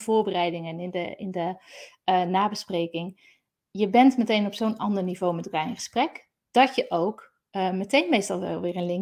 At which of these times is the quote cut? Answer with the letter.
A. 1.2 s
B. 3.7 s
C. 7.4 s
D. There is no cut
D